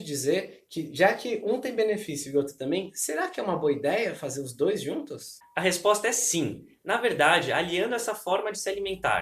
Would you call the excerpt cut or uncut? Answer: uncut